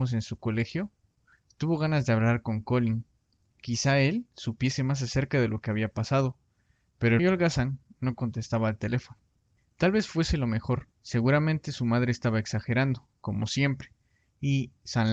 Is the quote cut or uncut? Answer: cut